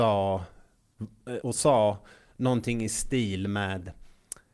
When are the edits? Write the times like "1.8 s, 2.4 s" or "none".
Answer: 1.4 s